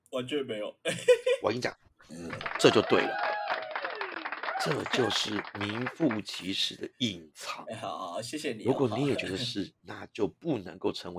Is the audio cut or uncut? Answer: uncut